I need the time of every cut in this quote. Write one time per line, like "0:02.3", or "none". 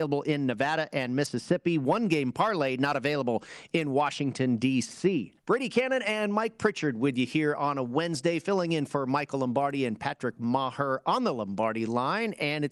0:05.4